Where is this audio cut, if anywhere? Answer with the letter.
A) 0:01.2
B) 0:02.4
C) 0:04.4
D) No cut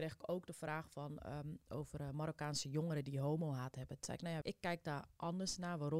C